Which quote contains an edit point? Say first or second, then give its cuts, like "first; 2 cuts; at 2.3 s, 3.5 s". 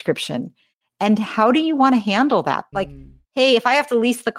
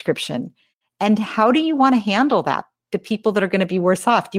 first; 1 cut; at 2.7 s